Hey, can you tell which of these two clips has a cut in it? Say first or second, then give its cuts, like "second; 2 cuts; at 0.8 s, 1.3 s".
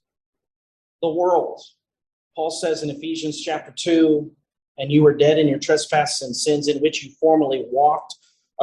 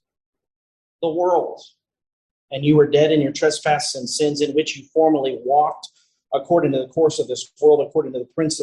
second; 1 cut; at 2.3 s